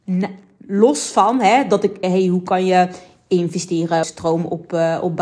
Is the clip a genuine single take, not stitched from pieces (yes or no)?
no